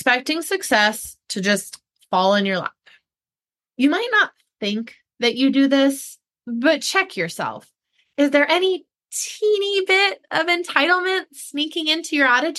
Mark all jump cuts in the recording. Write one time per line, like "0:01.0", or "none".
none